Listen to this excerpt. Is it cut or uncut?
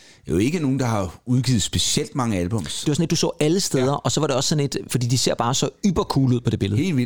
cut